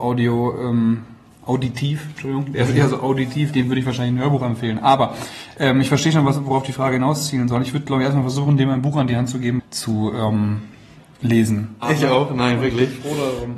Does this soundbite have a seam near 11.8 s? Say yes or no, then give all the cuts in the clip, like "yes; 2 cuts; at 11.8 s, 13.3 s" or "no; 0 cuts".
yes; 2 cuts; at 9.6 s, 11.8 s